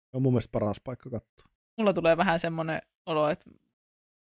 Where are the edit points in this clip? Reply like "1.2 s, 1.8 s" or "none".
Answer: 1.6 s